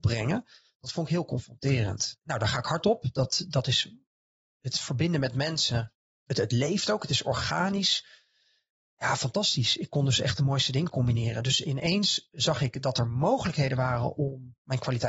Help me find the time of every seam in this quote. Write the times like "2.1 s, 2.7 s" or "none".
2.2 s, 6.3 s